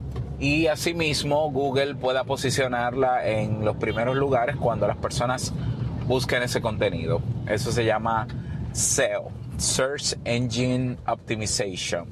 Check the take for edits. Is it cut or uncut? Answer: uncut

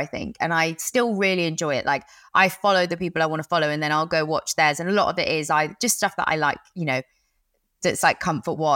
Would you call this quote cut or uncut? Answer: uncut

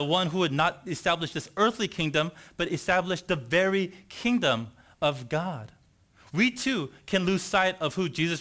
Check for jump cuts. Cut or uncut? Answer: cut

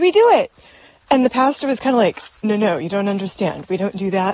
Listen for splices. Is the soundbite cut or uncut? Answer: cut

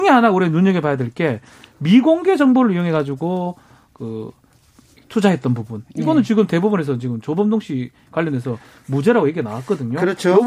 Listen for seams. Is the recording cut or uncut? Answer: uncut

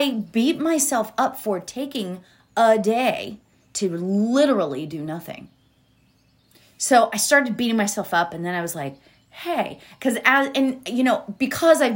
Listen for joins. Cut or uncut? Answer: uncut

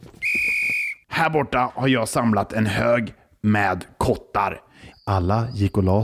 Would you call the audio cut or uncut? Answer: cut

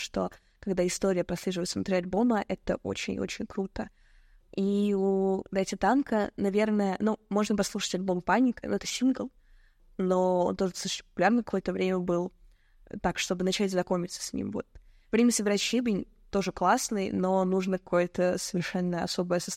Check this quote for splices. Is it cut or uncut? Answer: uncut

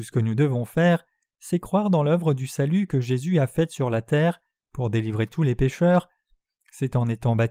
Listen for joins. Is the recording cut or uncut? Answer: uncut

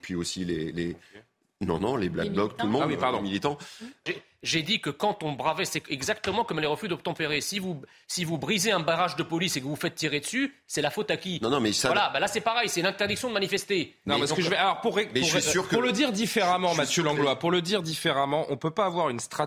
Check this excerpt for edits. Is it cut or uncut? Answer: cut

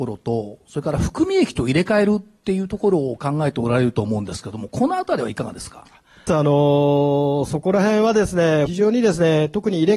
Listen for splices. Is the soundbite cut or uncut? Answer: cut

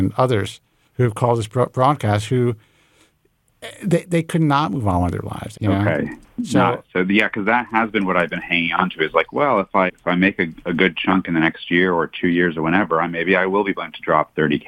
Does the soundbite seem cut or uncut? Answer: cut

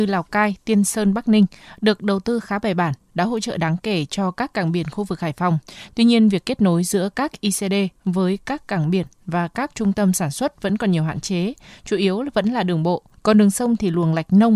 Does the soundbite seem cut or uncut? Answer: cut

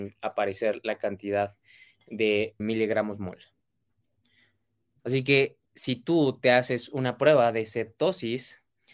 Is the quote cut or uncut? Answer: cut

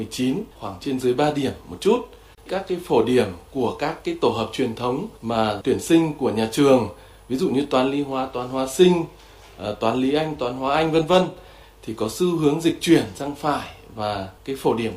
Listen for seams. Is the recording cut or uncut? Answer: cut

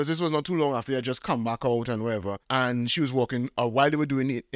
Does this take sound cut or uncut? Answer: cut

